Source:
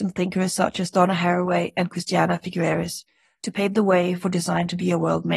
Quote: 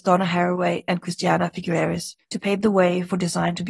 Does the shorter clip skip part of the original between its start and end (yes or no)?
yes